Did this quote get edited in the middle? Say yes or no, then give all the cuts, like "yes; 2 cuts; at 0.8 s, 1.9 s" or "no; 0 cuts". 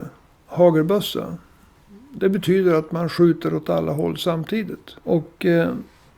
yes; 1 cut; at 5.0 s